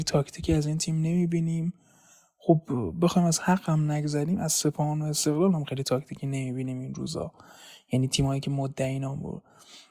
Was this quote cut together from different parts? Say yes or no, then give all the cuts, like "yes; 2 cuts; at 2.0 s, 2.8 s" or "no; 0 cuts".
no; 0 cuts